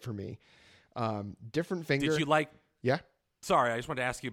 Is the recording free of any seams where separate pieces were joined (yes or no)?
yes